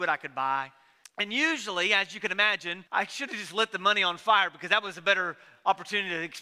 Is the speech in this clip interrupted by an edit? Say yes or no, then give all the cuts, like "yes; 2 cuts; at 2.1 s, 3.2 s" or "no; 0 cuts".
yes; 2 cuts; at 1.0 s, 2.9 s